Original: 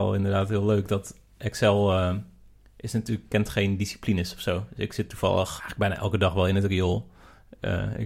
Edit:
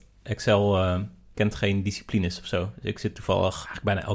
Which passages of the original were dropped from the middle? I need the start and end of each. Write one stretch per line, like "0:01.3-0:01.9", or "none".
0:02.5-0:03.3